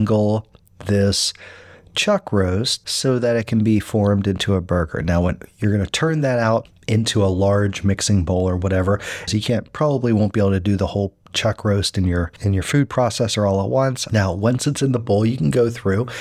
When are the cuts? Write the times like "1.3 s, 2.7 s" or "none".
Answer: 9.3 s, 14.1 s